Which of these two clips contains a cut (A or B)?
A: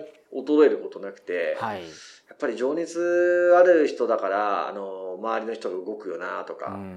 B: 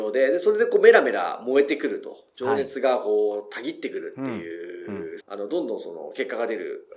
B